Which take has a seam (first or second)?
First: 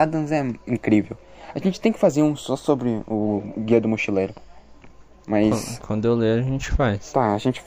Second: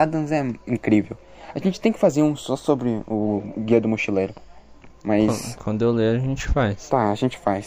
second